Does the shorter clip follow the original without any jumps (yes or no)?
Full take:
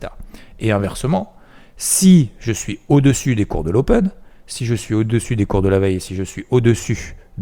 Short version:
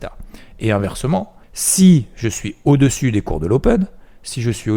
no